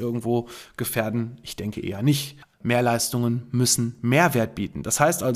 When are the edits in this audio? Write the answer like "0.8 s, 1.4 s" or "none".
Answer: 2.5 s